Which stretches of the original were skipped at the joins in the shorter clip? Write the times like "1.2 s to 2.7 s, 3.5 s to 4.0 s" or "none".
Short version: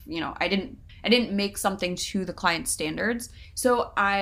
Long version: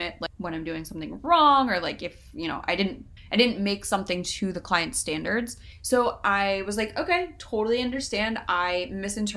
none